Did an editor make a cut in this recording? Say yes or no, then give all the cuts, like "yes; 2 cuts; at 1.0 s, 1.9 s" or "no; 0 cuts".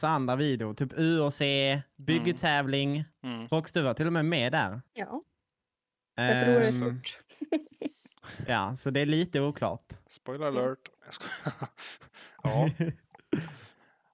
yes; 1 cut; at 4.9 s